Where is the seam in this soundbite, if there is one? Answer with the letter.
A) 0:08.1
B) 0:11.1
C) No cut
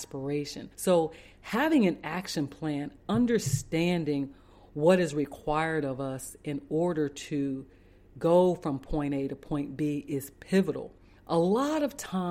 B